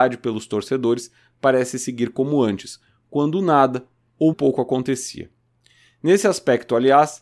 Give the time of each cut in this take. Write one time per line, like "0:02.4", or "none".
0:04.3